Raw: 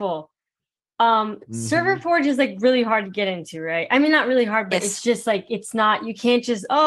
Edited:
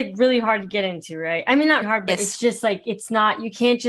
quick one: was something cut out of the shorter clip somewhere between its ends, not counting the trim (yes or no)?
yes